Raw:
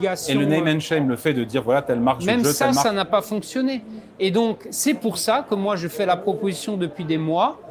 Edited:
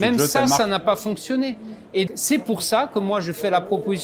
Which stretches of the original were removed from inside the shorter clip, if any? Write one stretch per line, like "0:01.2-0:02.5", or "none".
0:04.3-0:04.6